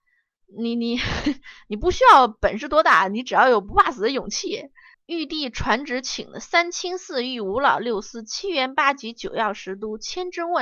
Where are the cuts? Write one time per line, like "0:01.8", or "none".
0:04.9